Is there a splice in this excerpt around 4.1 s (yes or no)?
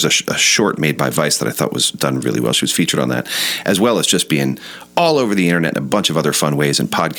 no